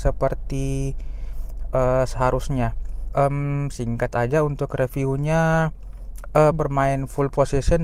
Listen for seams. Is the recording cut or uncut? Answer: cut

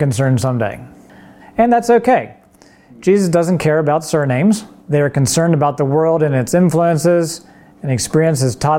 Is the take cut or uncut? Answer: cut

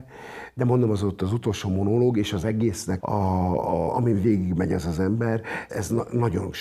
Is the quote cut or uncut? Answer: cut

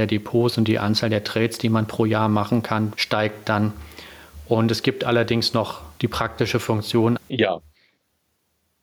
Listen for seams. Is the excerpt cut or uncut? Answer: cut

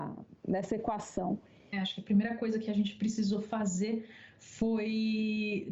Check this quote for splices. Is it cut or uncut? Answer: cut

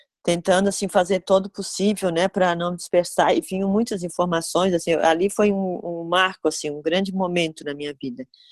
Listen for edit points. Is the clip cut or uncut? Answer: uncut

